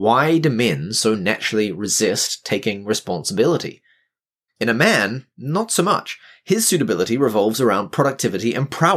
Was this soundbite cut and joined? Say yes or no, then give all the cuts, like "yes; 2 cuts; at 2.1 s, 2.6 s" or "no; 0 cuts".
yes; 1 cut; at 4.5 s